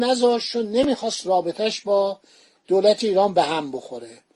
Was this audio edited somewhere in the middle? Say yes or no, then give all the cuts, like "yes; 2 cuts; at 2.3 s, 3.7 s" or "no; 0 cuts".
no; 0 cuts